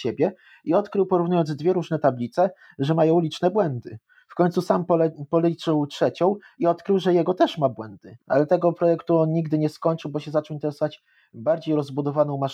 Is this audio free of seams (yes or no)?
no